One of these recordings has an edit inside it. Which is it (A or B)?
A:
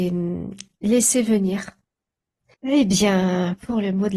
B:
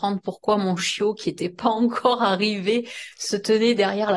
A